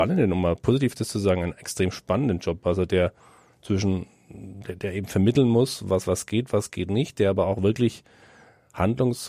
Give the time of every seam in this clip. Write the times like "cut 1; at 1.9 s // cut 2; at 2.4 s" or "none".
none